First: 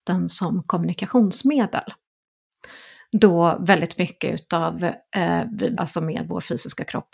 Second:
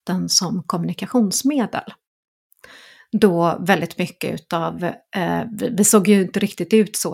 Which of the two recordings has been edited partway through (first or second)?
first